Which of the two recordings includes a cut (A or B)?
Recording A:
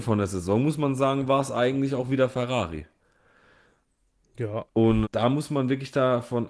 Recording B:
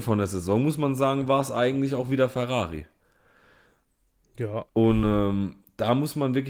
A